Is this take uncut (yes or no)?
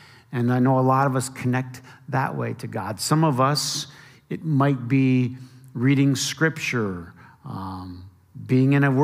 yes